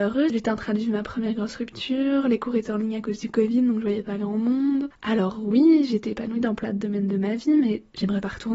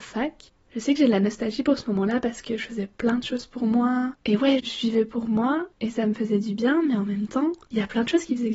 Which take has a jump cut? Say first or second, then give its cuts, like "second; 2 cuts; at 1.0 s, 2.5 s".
second; 1 cut; at 4.6 s